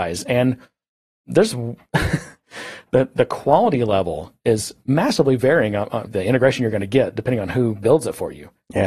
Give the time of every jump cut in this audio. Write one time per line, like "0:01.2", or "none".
0:06.1

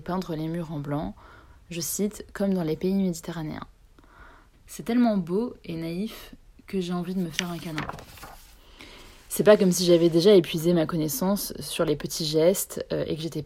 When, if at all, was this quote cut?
0:04.5

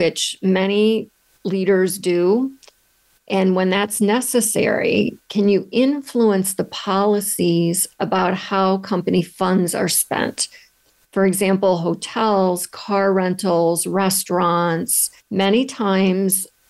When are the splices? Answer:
0:15.2

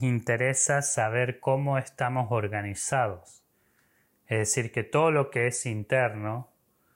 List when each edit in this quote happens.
none

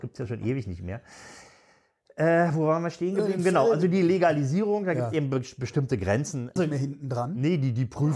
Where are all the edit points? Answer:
0:06.6

